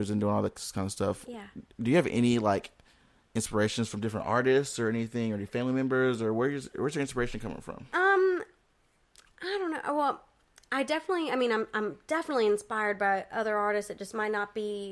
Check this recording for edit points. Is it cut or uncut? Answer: uncut